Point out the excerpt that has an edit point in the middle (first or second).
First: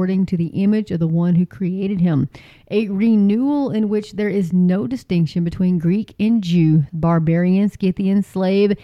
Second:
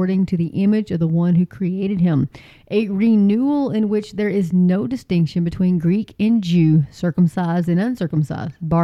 first